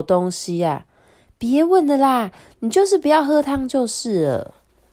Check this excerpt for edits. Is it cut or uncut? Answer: uncut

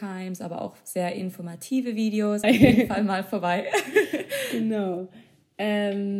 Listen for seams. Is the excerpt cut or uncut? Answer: cut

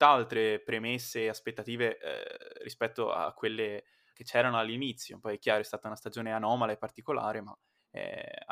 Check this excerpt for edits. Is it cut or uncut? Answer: cut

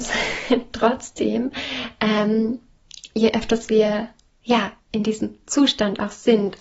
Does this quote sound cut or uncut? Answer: uncut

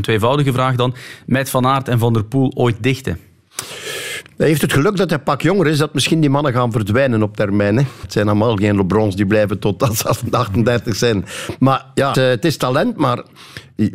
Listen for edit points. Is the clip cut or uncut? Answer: cut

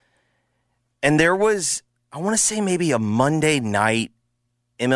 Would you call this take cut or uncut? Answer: uncut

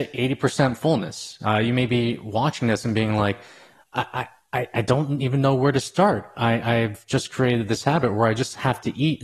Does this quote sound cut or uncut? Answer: uncut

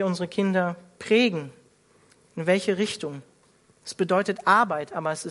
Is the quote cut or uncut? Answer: uncut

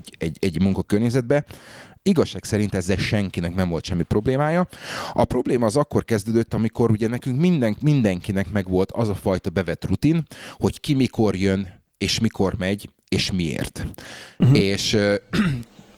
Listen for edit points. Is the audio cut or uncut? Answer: uncut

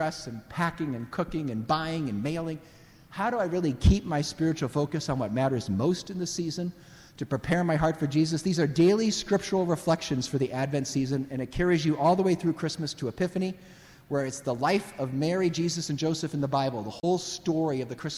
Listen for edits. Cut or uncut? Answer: uncut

